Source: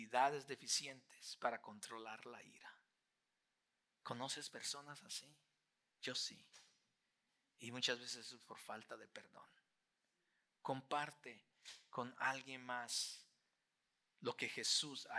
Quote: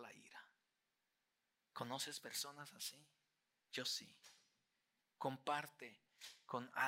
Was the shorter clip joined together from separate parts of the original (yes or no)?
yes